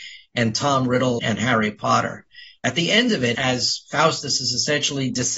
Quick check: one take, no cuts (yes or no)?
no